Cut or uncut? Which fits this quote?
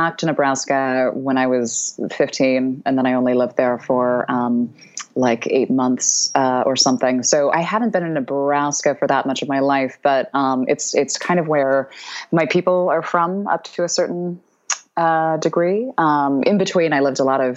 cut